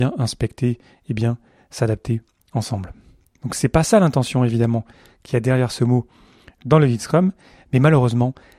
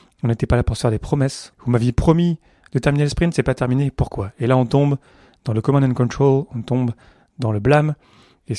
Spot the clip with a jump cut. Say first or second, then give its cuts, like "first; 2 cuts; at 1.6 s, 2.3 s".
second; 1 cut; at 1.5 s